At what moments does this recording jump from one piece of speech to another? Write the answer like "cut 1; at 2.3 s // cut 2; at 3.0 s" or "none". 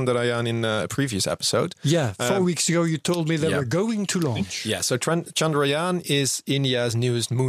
none